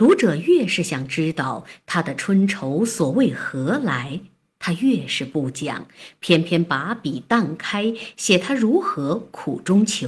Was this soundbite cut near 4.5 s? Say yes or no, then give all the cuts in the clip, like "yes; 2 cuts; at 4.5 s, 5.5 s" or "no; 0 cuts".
no; 0 cuts